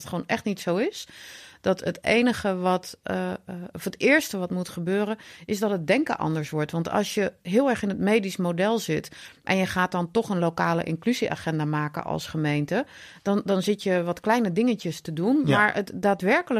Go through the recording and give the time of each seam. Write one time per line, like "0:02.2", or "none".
none

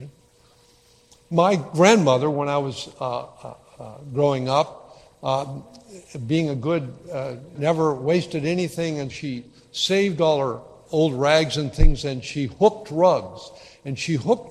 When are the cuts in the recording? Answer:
0:07.6
0:09.1

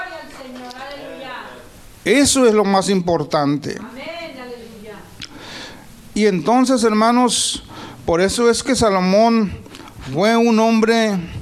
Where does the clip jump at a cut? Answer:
none

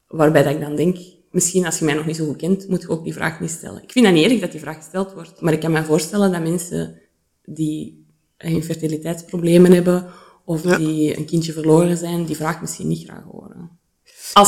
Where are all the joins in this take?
none

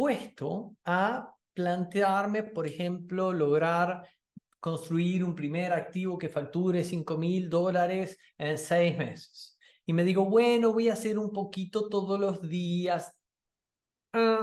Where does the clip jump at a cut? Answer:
none

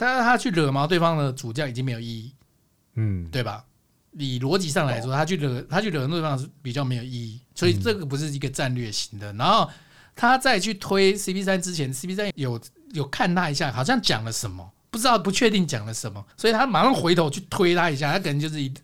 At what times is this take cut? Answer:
0:12.3
0:16.3

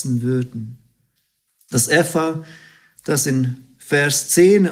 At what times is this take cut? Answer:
0:01.7

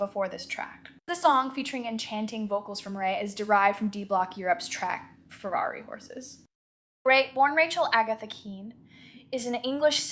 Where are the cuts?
none

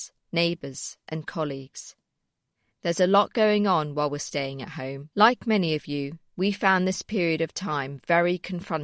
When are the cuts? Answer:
0:02.7
0:05.1
0:06.3

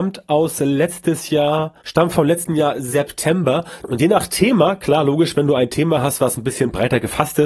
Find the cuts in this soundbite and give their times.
0:01.8
0:03.8

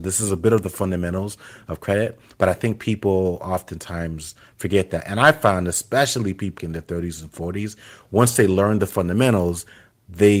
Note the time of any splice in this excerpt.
0:06.6

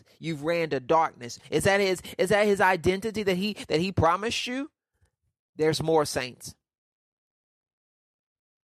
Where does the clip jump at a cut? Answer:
0:01.4
0:05.5

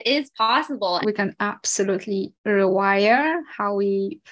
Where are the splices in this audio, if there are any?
0:01.0
0:02.3

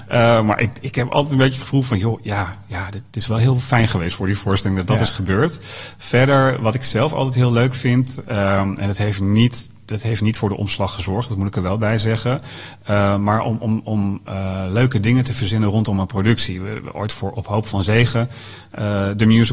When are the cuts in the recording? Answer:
none

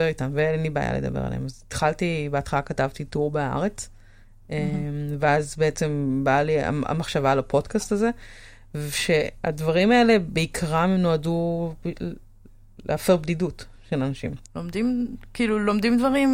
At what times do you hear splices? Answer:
0:14.4

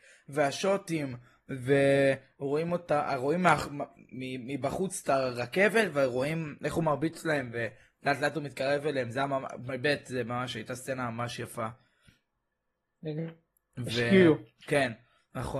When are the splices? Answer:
none

